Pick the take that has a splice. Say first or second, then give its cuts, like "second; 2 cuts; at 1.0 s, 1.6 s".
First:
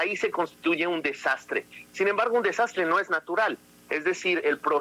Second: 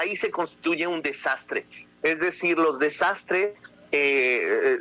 second; 1 cut; at 1.9 s